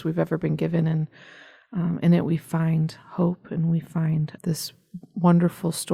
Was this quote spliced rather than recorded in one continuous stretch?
yes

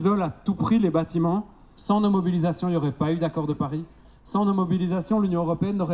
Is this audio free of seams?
no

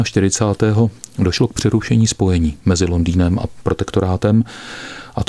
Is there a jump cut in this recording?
yes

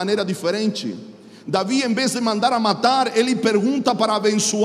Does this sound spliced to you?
no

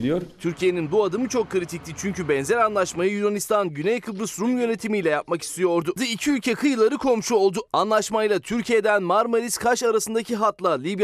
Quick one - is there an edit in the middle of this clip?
yes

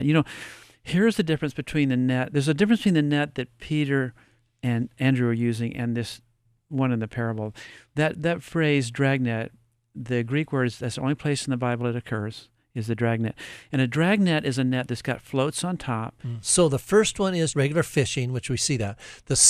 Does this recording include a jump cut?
yes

